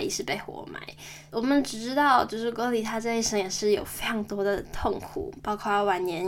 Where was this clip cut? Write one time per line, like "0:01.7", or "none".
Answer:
0:01.3
0:02.5